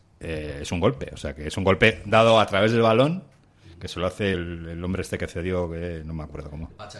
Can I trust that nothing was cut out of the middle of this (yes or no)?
yes